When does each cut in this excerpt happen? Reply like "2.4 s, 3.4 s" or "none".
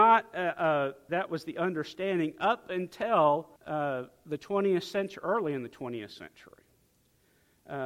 1.1 s, 3.6 s